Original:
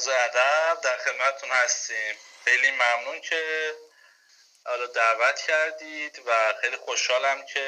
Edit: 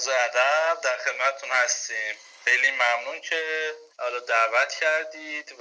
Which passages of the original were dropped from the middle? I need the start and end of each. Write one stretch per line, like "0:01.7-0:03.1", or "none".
0:03.9-0:04.6